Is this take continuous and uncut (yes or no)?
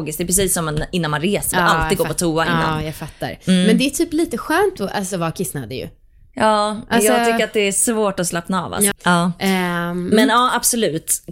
no